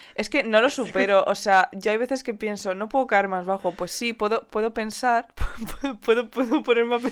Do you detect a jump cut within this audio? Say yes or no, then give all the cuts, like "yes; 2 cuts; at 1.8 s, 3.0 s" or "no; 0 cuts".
no; 0 cuts